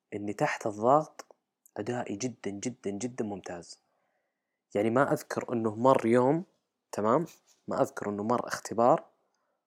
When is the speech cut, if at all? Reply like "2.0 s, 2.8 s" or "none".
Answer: none